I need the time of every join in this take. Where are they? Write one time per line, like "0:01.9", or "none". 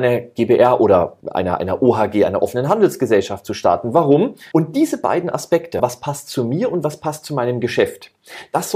0:01.2
0:04.5
0:05.8